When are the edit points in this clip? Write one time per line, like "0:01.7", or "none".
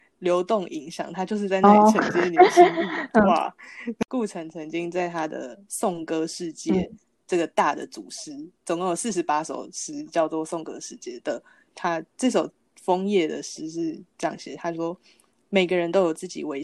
0:11.7